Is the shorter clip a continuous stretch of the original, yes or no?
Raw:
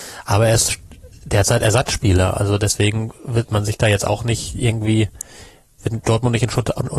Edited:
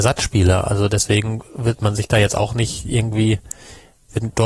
yes